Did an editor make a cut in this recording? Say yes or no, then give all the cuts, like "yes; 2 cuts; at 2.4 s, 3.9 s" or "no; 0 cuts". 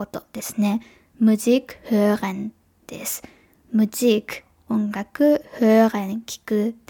no; 0 cuts